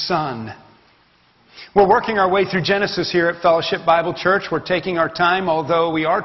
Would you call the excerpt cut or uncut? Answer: uncut